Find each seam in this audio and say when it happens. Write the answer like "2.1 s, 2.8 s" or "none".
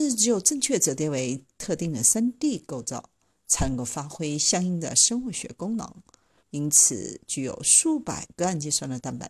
6.4 s